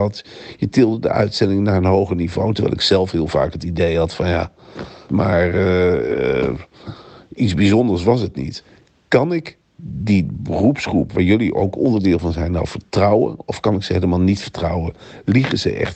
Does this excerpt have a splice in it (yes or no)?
yes